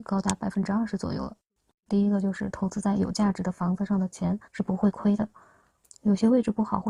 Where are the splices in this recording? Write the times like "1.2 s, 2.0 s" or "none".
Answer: 1.9 s, 4.5 s

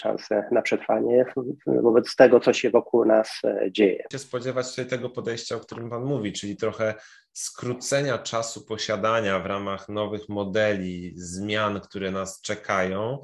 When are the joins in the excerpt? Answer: 4.1 s

